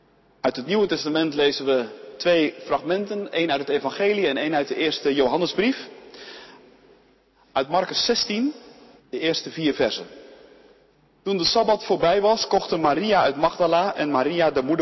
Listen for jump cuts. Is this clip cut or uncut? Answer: uncut